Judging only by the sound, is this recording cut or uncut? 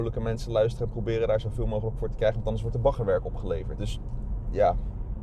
cut